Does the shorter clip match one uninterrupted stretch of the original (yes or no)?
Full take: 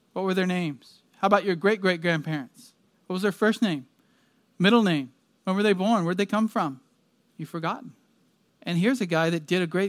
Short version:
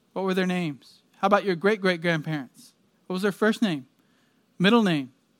yes